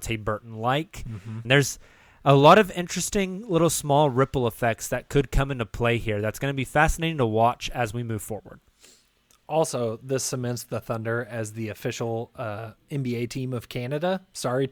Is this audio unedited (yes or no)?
no